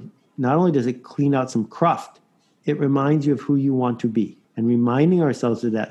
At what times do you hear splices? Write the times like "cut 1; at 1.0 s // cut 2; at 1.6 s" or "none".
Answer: cut 1; at 4.4 s